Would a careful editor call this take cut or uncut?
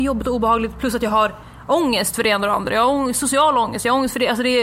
uncut